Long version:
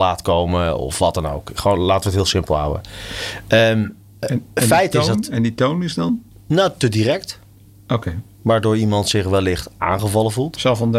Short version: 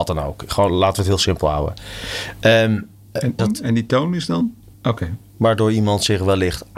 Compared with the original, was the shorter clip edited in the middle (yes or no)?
yes